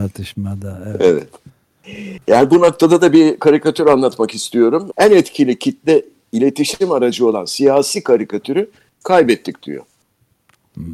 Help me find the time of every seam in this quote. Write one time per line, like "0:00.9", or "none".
0:04.9